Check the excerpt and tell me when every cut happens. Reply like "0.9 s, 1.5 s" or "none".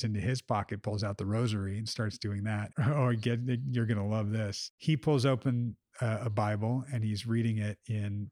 2.7 s